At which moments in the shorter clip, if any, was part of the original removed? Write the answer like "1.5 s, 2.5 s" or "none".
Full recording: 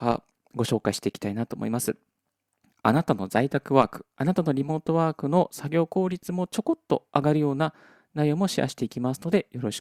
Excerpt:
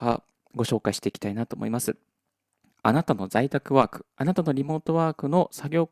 none